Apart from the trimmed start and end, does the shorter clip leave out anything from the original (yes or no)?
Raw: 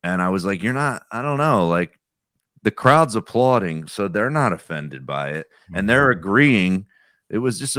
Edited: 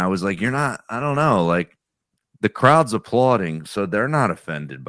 no